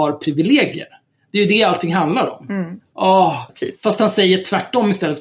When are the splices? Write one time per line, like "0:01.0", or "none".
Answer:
0:03.5